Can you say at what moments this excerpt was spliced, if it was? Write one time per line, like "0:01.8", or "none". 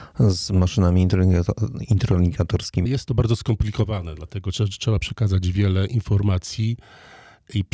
0:02.9